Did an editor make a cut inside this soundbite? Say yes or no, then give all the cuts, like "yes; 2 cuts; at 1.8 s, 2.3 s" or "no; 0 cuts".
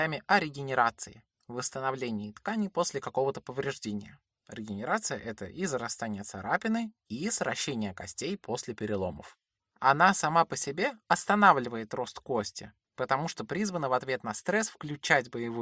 yes; 2 cuts; at 4.3 s, 9.6 s